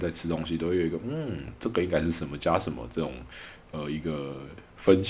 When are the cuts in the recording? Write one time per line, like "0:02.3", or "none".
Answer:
none